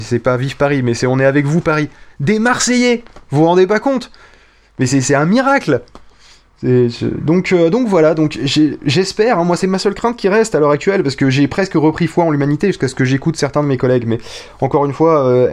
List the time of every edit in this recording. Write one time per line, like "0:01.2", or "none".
none